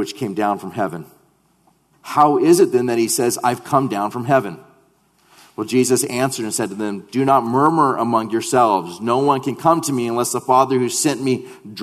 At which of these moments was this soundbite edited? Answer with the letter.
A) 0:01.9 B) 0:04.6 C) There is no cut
A